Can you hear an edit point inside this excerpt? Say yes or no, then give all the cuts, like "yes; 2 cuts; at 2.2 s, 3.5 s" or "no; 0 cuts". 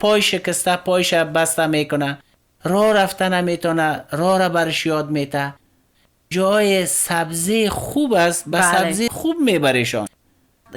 no; 0 cuts